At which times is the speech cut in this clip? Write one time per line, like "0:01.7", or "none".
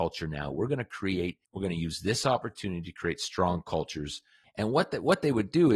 0:01.4
0:04.4